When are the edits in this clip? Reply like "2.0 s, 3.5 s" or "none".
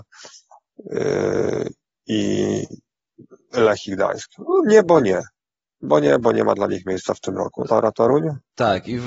7.6 s